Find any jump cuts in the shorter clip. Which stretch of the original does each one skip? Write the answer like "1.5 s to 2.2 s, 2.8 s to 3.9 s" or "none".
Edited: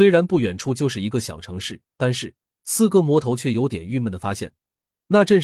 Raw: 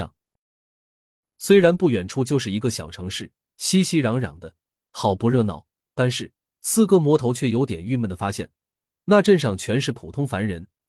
3.4 s to 5.8 s